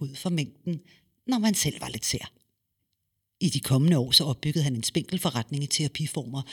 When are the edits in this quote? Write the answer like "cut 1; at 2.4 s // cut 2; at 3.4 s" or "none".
none